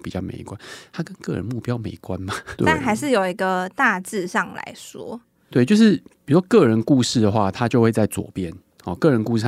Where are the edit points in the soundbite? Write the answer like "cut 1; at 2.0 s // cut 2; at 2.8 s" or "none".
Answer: cut 1; at 2.6 s